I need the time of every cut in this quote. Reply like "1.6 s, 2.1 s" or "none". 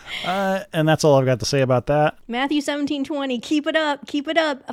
2.2 s, 3.4 s